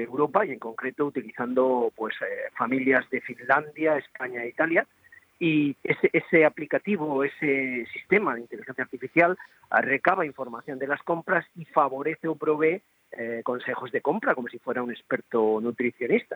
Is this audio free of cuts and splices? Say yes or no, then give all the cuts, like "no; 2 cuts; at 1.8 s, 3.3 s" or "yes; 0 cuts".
yes; 0 cuts